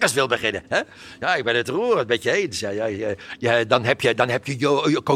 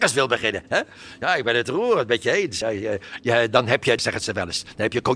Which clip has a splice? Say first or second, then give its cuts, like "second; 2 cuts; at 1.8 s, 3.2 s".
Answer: second; 2 cuts; at 2.6 s, 4.0 s